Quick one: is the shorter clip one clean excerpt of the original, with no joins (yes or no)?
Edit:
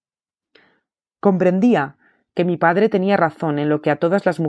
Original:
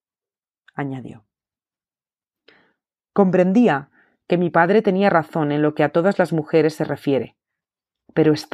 yes